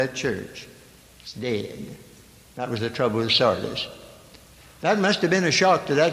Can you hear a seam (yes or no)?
no